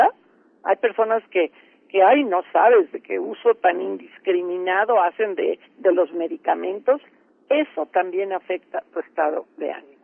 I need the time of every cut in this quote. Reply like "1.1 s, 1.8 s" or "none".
none